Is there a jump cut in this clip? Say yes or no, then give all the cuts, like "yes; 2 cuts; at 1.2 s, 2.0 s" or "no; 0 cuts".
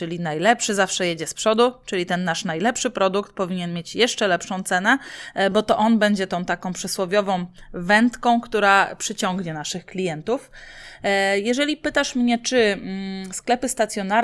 no; 0 cuts